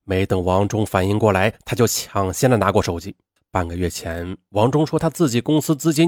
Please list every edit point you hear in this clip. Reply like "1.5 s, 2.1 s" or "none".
3.4 s